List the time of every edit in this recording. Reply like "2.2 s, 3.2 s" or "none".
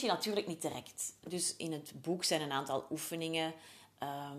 none